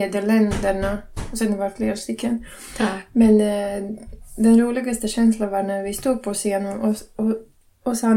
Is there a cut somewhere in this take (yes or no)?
no